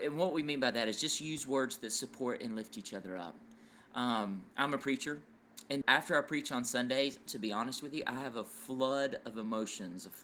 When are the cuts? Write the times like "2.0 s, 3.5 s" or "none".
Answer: 5.8 s, 7.3 s